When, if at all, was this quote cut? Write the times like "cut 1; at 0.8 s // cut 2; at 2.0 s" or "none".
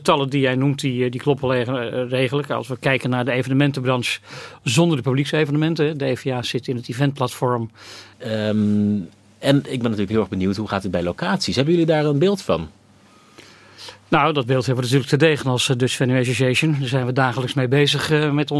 cut 1; at 8.1 s